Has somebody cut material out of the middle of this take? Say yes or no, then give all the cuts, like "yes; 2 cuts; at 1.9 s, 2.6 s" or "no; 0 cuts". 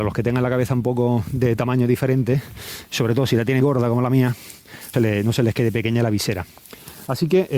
yes; 2 cuts; at 3.6 s, 4.9 s